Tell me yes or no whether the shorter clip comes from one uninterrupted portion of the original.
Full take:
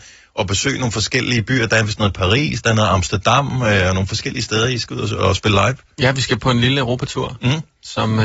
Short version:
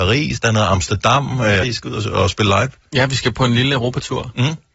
no